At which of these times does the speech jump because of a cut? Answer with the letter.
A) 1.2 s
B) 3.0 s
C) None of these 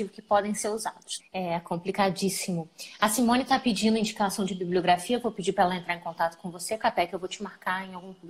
A